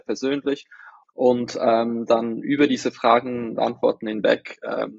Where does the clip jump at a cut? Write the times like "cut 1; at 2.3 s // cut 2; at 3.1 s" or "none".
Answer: cut 1; at 1.0 s